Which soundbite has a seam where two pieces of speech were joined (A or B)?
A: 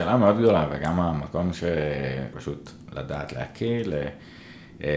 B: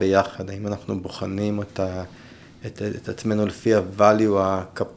A